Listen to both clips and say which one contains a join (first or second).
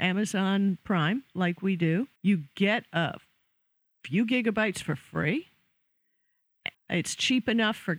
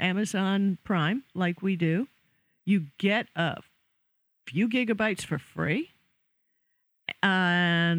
first